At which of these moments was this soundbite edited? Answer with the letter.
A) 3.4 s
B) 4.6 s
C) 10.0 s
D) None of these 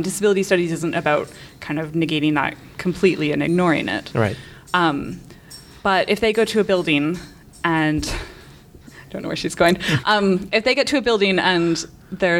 C